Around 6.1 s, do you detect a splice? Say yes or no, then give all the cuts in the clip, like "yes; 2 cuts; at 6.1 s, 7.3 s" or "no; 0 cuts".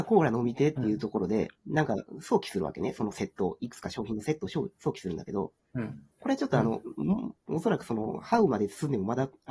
yes; 1 cut; at 6.1 s